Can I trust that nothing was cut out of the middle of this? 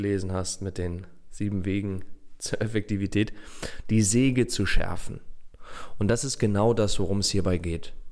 no; 1 cut; at 3.8 s

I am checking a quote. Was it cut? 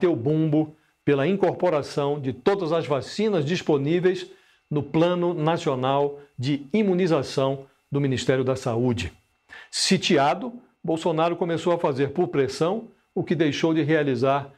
no; 0 cuts

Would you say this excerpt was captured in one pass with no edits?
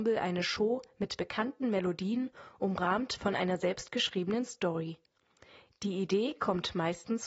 yes; 0 cuts

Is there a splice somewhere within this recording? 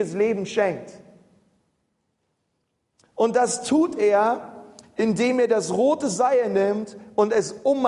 no; 0 cuts

